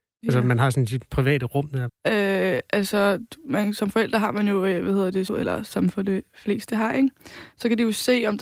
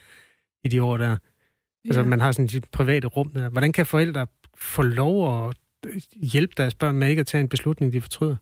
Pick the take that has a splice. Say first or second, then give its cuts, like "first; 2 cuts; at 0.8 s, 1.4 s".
first; 2 cuts; at 1.9 s, 5.3 s